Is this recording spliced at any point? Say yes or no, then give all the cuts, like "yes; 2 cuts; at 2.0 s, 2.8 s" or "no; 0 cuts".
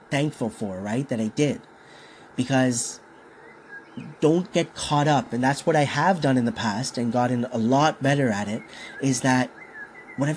no; 0 cuts